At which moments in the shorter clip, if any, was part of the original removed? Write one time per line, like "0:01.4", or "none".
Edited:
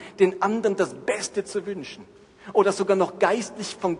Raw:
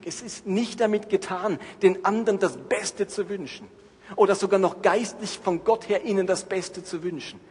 none